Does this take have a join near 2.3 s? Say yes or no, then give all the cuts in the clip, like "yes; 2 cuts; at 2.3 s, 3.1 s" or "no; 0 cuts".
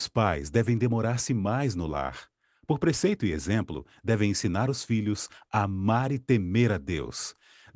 no; 0 cuts